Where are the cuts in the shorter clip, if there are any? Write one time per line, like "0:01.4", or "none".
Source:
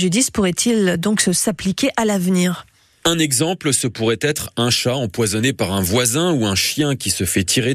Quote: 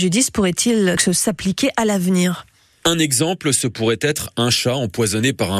0:01.0